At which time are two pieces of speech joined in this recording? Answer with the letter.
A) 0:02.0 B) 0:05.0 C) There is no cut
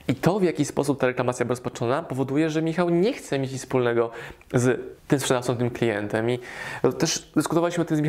B